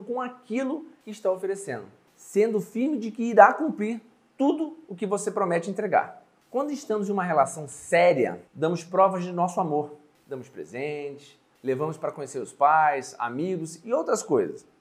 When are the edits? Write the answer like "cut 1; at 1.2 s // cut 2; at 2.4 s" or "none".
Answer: cut 1; at 8.5 s